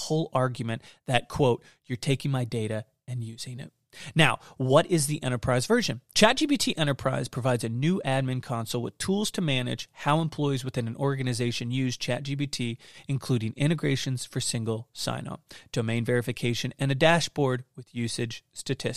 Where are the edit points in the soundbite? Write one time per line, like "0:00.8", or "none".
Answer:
0:06.1